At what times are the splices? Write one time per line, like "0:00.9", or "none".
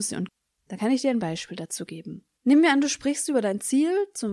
0:02.3